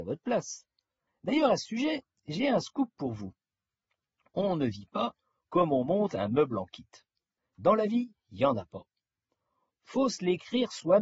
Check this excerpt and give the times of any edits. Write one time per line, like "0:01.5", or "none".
0:01.1
0:07.4
0:09.7